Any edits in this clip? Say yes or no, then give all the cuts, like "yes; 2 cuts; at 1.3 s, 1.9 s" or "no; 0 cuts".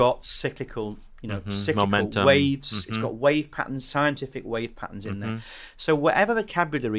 no; 0 cuts